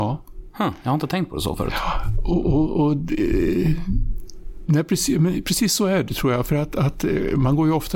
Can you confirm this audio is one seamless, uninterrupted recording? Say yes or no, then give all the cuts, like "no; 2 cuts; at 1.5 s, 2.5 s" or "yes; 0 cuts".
yes; 0 cuts